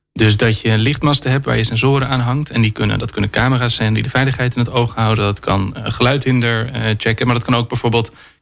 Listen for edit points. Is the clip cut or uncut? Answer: uncut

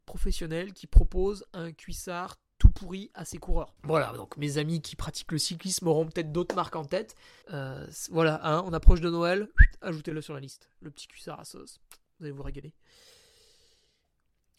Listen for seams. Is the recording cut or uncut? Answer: cut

